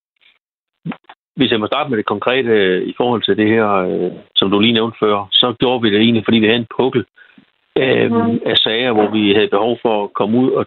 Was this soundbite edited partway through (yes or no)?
no